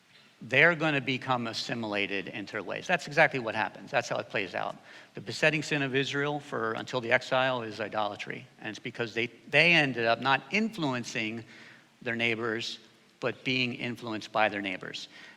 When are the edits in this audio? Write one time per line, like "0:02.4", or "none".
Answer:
none